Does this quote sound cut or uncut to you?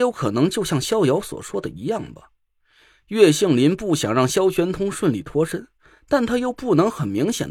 uncut